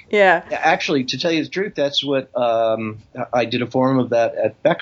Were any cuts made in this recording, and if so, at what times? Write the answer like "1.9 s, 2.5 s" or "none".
none

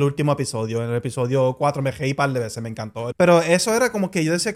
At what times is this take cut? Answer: 3.1 s

